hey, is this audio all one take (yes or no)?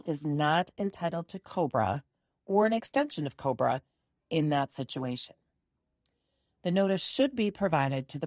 yes